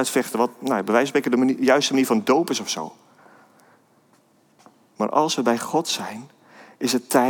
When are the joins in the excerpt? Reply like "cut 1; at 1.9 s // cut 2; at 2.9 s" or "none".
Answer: cut 1; at 4.9 s